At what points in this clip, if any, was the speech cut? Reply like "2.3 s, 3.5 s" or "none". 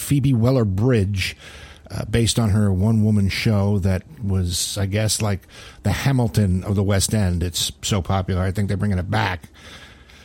none